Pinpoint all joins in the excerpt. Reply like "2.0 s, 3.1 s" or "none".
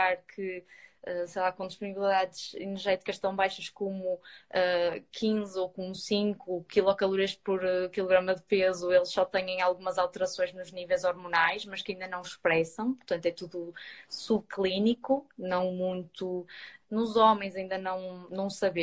16.8 s